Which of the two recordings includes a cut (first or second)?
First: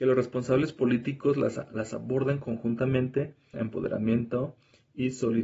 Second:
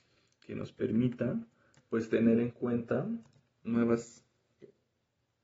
first